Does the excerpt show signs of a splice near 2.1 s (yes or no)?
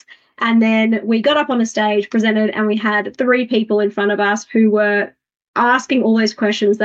no